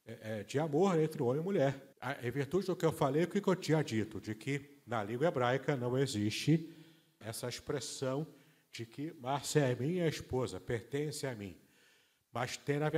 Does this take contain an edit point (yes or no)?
yes